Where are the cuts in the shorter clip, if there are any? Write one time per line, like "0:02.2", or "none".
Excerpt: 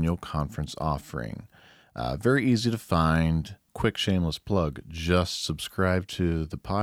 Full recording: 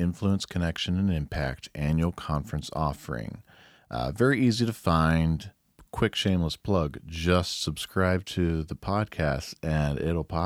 0:03.7